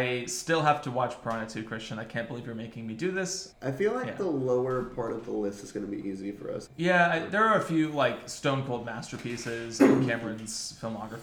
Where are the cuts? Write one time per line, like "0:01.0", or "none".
0:03.5
0:06.7